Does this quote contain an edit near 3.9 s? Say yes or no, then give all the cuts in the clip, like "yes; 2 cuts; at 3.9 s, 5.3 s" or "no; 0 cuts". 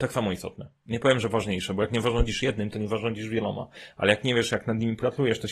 no; 0 cuts